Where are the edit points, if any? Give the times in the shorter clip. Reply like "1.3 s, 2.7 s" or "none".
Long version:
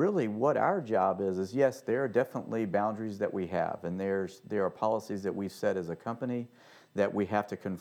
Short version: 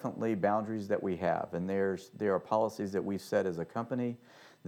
none